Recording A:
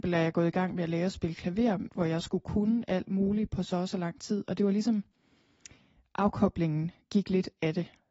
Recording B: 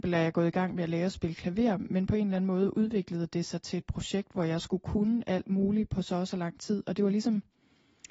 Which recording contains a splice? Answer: A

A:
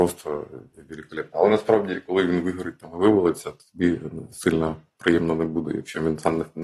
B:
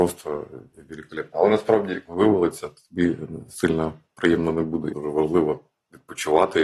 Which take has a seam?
B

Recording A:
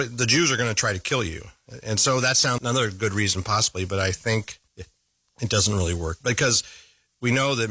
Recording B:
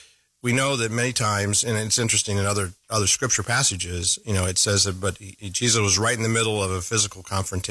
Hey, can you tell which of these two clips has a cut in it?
A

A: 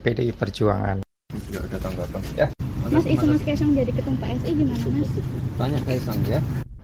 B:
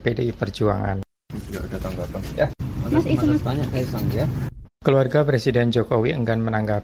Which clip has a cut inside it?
B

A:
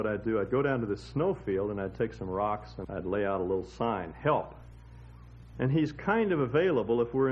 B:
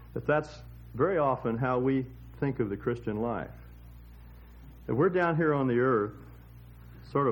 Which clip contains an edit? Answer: A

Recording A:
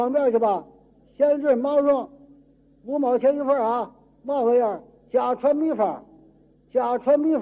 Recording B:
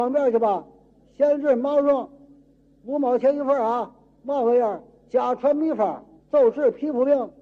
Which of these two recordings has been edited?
B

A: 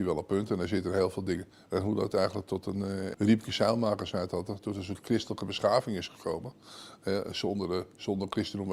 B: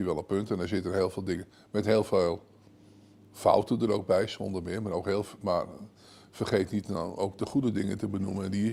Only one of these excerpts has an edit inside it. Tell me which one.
A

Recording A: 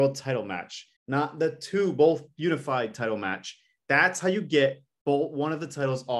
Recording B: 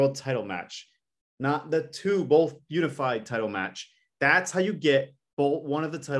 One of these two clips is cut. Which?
A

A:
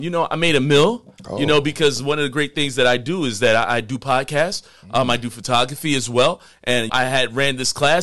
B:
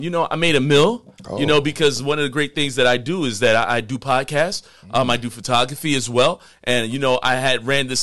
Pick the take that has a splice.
A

